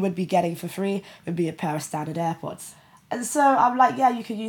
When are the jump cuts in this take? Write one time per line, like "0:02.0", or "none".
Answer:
none